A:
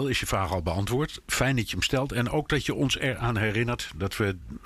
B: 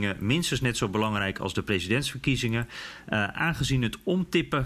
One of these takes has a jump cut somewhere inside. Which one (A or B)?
B